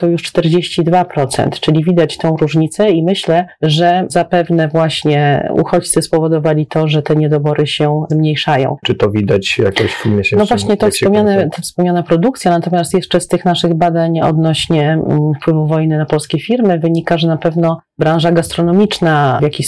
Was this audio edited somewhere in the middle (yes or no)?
yes